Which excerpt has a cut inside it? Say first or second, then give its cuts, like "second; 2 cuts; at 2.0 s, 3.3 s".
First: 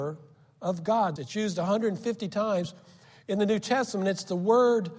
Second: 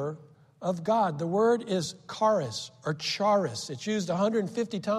first; 1 cut; at 1.2 s